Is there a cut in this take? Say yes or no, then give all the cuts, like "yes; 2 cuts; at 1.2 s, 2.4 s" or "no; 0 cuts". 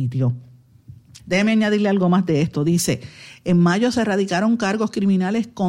yes; 1 cut; at 1.2 s